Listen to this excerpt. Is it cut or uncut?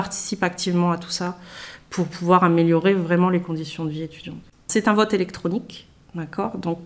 uncut